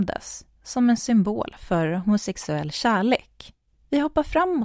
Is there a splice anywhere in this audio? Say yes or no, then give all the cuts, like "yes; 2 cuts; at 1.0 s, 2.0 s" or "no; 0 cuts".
yes; 1 cut; at 3.7 s